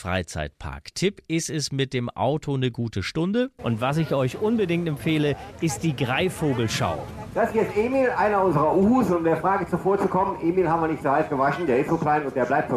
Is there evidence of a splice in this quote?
yes; 1 cut; at 3.6 s

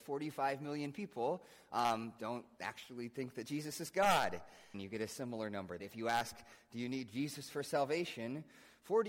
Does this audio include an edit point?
yes; 2 cuts; at 4.7 s, 5.8 s

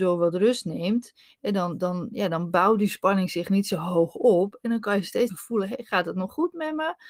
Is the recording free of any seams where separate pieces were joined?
no; 1 cut; at 5.3 s

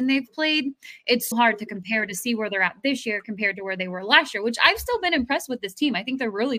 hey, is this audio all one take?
no; 1 cut; at 1.3 s

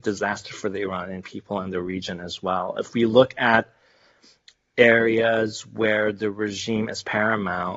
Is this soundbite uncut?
yes; 0 cuts

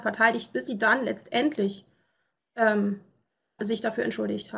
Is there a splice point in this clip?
yes; 1 cut; at 3.6 s

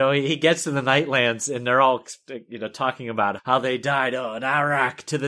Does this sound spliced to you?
yes; 1 cut; at 3.4 s

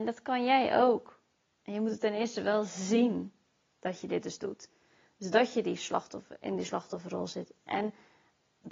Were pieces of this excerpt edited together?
yes; 1 cut; at 1.5 s

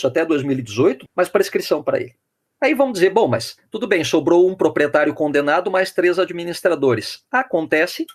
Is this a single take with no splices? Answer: no; 1 cut; at 1.1 s

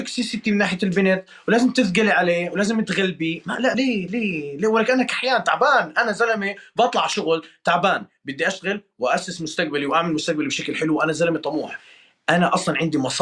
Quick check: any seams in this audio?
no; 0 cuts

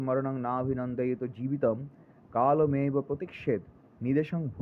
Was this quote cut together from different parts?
no; 0 cuts

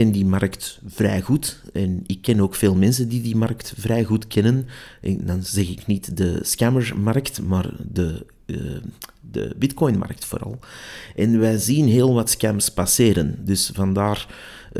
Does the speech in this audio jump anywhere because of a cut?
no; 0 cuts

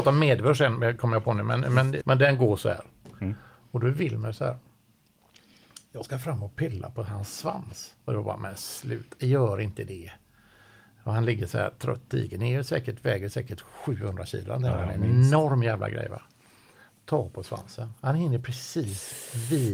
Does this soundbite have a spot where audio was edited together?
yes; 1 cut; at 2.0 s

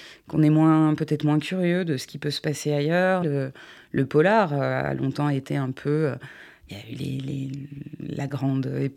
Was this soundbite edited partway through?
yes; 1 cut; at 3.2 s

